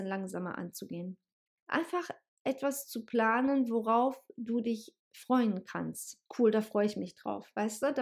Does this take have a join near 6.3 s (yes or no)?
yes